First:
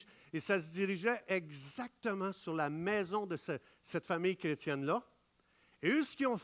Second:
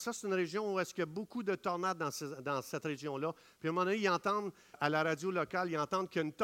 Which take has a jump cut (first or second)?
second